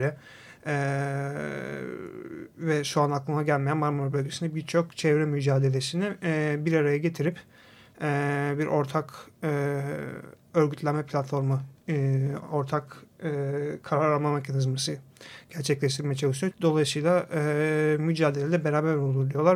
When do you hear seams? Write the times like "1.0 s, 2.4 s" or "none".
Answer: 16.5 s